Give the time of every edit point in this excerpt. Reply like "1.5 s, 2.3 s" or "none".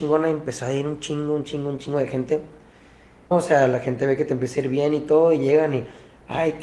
3.3 s